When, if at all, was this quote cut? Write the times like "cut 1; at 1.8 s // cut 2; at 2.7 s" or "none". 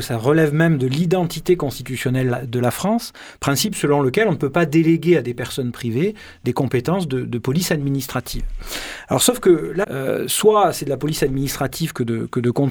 cut 1; at 9.8 s